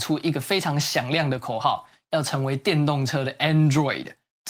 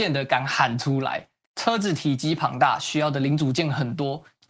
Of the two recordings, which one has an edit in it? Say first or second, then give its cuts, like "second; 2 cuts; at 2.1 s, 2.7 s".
second; 1 cut; at 1.5 s